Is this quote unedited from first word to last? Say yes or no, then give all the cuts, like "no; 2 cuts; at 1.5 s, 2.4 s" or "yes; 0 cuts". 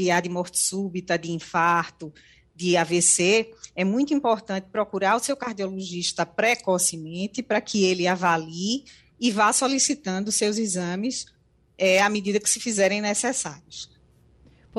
yes; 0 cuts